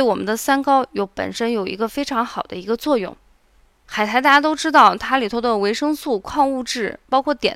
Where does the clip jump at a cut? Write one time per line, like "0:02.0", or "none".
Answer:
0:03.9